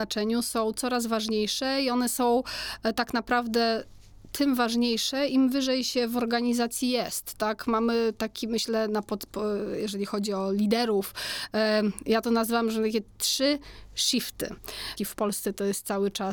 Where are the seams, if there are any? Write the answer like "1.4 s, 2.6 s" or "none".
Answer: 15.0 s